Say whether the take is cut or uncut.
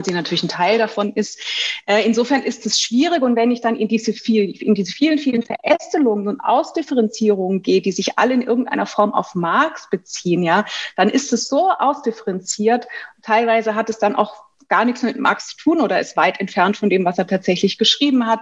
uncut